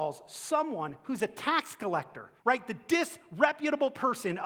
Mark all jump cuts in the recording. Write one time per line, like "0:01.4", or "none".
0:02.4